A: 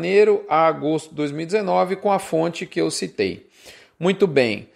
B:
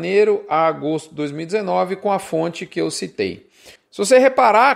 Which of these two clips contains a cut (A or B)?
B